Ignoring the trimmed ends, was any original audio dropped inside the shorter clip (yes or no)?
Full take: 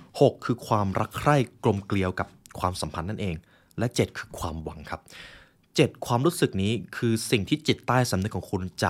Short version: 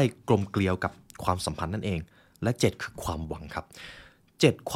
no